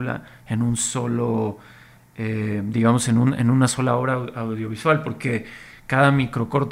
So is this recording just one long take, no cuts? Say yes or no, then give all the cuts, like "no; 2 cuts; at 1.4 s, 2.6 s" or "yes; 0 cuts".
yes; 0 cuts